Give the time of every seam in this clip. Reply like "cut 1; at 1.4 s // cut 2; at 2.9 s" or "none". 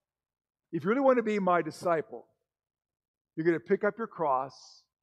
none